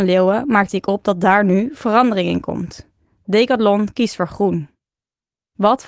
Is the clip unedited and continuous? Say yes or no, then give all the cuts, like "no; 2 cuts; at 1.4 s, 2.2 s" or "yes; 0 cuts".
yes; 0 cuts